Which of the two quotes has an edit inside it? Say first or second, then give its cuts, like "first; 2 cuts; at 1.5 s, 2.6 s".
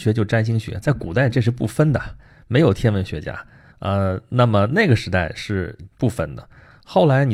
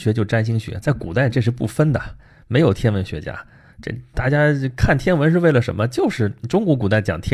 first; 1 cut; at 3.7 s